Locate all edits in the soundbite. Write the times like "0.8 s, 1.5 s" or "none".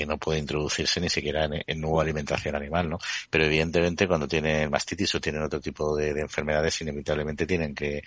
3.2 s